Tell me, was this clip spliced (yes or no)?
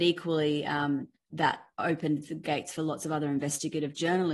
no